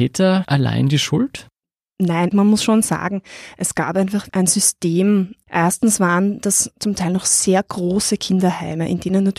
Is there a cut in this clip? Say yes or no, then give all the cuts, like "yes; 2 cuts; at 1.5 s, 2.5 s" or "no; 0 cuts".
yes; 1 cut; at 4.3 s